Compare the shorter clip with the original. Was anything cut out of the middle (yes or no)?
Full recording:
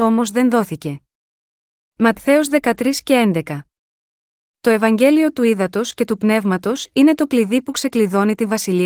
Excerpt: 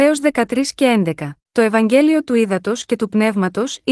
yes